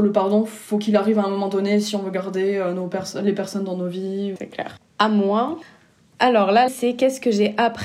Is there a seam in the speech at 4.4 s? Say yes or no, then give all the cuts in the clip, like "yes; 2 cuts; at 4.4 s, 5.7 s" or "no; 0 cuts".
no; 1 cut; at 6.7 s